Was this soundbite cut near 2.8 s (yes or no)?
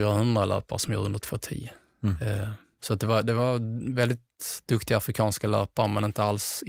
yes